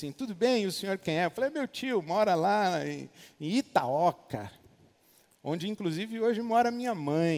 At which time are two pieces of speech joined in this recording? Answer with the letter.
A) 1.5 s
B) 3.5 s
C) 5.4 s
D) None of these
D